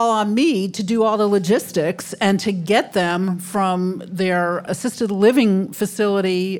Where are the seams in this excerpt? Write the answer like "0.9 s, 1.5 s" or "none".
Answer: 4.7 s